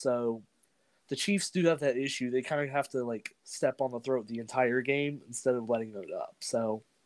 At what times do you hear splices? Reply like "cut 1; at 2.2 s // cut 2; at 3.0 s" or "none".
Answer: none